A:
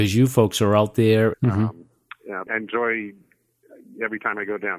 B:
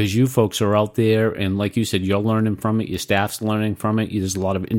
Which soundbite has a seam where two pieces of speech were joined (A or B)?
A